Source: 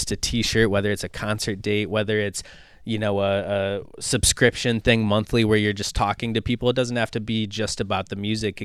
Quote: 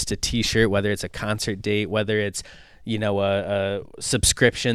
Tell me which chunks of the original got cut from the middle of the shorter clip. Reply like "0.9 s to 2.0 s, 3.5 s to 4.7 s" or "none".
none